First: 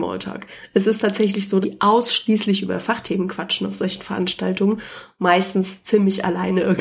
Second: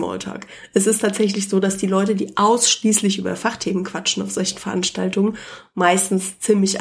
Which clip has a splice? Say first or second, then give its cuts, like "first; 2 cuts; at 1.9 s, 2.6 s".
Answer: first; 1 cut; at 1.6 s